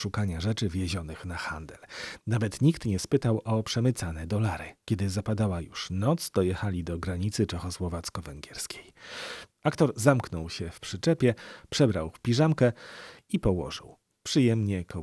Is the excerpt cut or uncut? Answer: cut